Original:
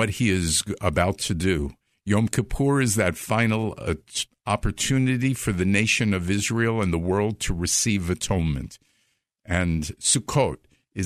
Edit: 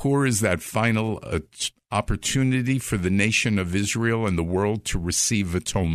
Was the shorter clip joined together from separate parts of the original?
no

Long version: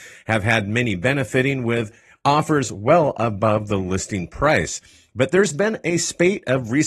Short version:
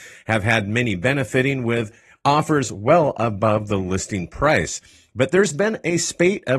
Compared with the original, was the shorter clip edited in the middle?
no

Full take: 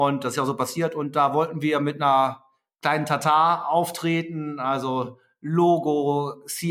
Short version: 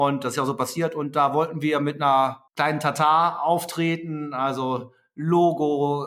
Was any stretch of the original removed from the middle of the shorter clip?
yes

